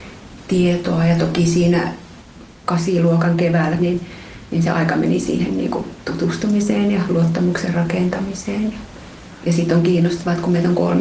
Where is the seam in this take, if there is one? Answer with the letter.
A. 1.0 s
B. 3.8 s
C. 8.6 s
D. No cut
B